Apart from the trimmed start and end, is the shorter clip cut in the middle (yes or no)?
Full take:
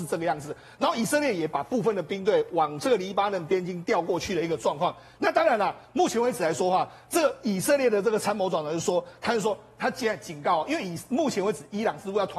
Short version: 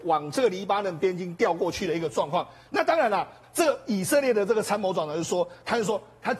yes